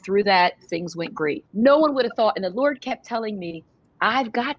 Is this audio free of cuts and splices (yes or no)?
no